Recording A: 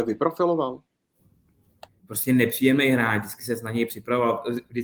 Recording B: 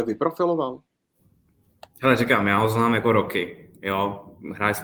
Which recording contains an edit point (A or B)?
A